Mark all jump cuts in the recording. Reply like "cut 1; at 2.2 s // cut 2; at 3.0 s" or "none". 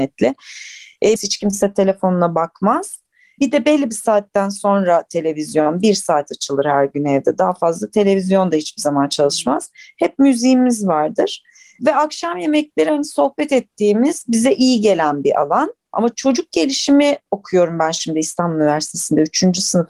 cut 1; at 1.2 s // cut 2; at 15.9 s